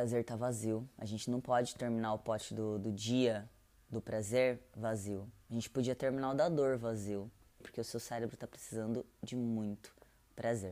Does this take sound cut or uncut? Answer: cut